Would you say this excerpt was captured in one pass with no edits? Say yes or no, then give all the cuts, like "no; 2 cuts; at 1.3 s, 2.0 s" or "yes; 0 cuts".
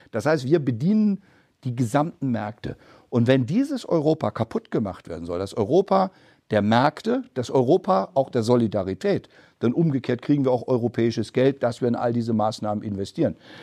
yes; 0 cuts